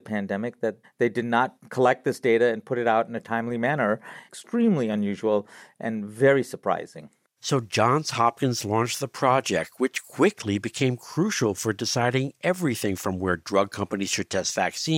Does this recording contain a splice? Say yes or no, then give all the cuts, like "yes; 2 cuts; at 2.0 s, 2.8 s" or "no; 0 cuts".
no; 0 cuts